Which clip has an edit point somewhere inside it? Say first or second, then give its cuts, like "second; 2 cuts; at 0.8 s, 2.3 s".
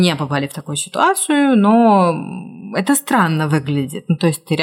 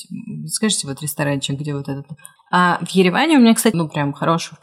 second; 2 cuts; at 2.4 s, 3.7 s